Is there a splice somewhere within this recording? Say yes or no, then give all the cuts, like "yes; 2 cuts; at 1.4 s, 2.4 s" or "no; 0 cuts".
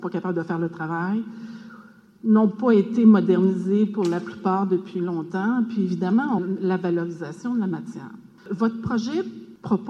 yes; 1 cut; at 6.4 s